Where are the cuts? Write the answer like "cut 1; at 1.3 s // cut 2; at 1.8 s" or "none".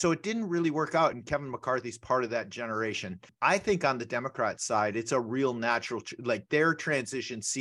none

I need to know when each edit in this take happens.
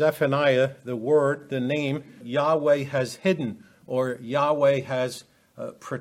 cut 1; at 2.2 s

